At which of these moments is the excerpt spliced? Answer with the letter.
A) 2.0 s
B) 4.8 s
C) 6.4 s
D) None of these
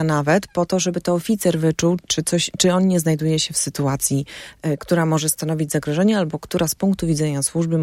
A